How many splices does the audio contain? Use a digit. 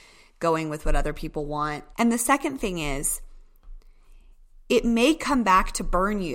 1